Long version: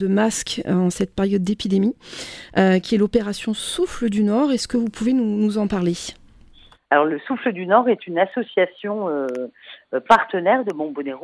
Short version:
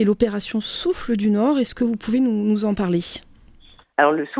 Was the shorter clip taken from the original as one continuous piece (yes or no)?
yes